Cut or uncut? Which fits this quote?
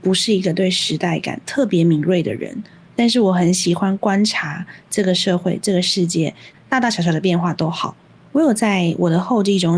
cut